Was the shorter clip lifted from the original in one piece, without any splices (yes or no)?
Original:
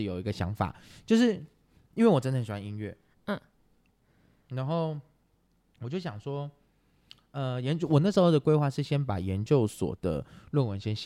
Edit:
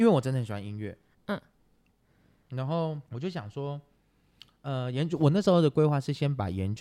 no